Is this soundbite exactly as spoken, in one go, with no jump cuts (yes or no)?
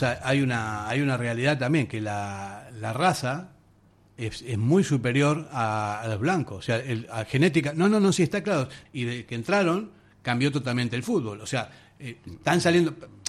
no